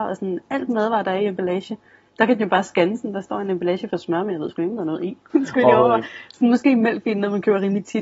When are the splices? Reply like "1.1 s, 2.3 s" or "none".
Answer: 5.3 s